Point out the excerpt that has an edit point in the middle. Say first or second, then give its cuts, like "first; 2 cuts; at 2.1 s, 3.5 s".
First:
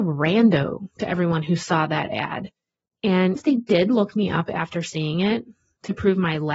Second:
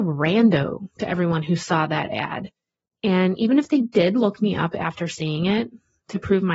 first; 1 cut; at 3.4 s